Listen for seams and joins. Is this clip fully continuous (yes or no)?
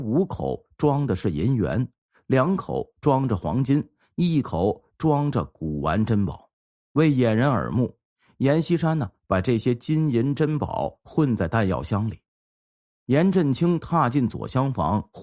yes